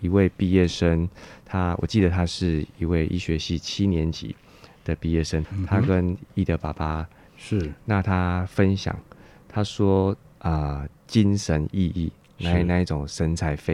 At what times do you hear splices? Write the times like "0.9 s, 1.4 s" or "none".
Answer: 5.4 s, 7.3 s, 10.4 s

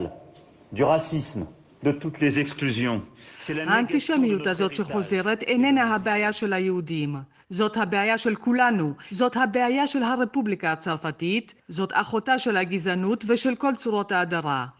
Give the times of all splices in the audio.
11.6 s

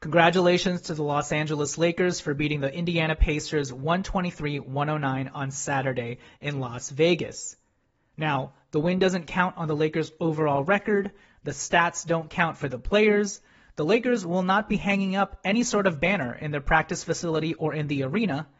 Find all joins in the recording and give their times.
none

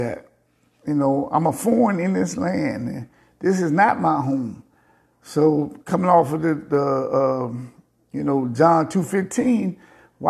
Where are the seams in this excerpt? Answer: none

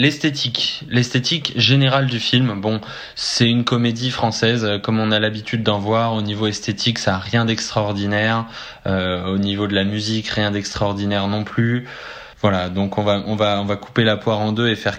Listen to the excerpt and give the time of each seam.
12.3 s

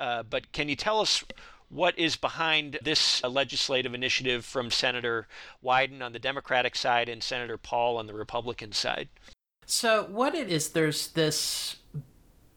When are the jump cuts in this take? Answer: 2.8 s

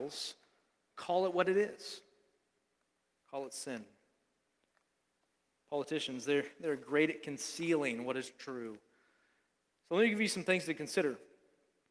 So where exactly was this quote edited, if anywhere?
none

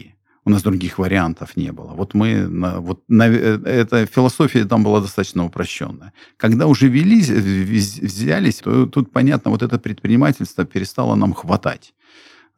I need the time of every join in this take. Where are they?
8.6 s

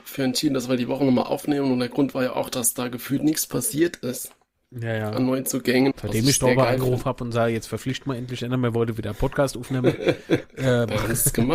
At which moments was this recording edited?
5.9 s

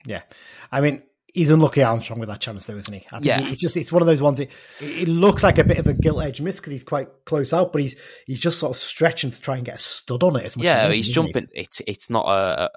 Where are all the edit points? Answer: 11.5 s

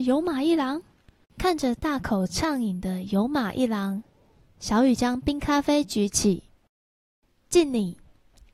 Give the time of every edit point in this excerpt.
1.2 s

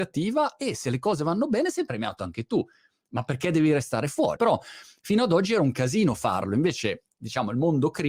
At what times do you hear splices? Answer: 4.4 s

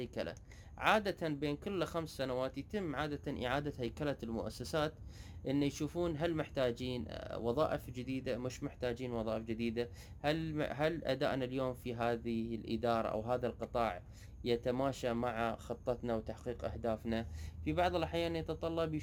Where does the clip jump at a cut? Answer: none

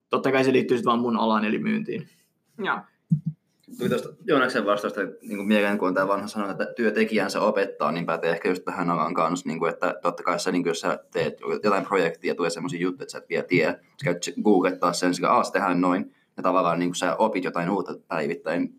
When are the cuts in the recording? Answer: none

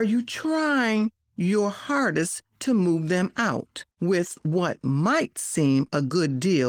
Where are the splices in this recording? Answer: 3.9 s

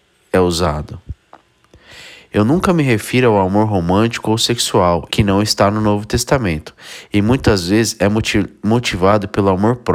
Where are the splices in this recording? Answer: 5.1 s

